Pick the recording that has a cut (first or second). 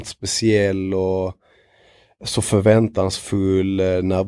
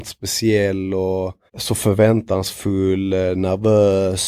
second